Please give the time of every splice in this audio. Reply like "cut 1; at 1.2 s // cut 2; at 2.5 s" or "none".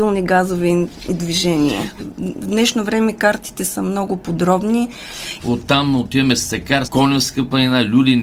cut 1; at 2.0 s // cut 2; at 5.4 s // cut 3; at 6.8 s